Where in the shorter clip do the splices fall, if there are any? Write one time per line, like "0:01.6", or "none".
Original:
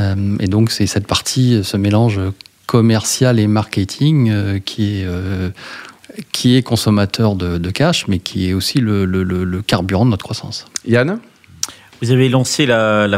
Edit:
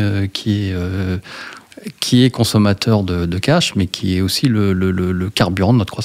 none

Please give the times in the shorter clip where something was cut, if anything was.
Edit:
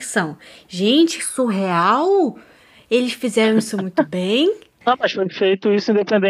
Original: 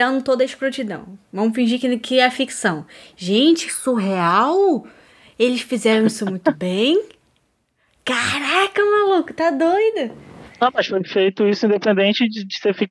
0:04.8

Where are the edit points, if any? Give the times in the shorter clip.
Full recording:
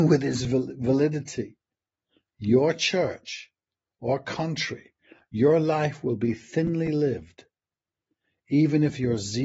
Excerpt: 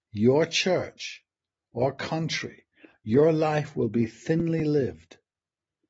none

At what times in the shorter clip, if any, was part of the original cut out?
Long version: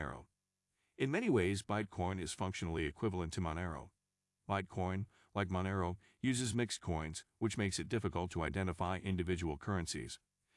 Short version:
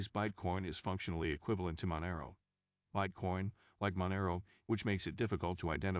0:04.6

